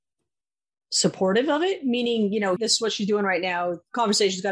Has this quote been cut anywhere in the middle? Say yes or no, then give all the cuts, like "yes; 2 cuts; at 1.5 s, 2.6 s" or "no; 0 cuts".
yes; 1 cut; at 2.6 s